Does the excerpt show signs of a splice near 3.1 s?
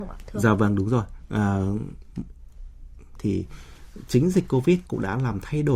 yes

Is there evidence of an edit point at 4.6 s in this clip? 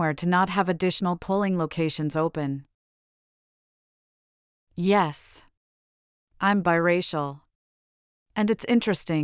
yes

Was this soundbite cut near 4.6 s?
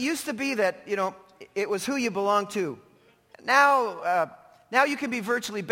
no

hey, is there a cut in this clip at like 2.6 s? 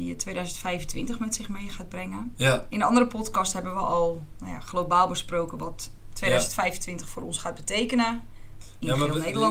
no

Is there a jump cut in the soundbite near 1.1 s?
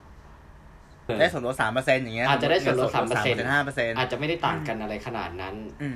yes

